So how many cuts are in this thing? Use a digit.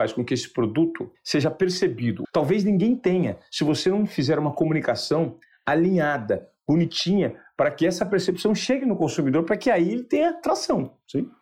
1